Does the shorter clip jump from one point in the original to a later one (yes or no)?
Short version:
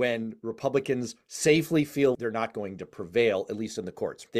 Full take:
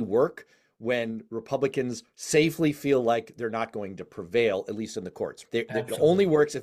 yes